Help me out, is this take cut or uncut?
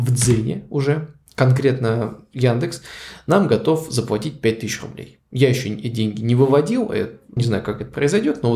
cut